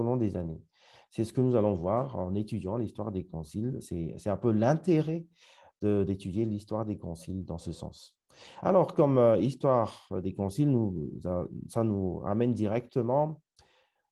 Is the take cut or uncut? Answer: uncut